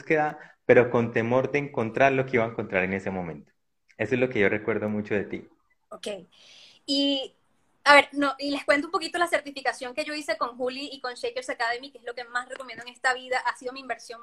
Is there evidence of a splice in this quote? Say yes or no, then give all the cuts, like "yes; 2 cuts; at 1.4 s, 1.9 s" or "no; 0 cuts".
no; 0 cuts